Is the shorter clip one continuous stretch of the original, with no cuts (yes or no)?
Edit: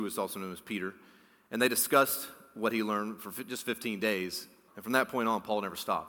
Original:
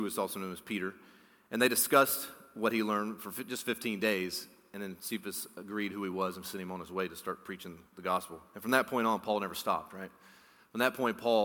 no